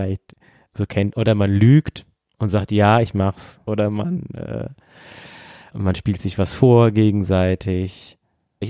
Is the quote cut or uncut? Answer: uncut